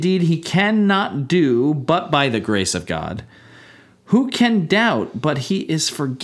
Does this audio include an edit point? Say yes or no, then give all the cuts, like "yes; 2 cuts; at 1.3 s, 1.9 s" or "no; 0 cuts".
no; 0 cuts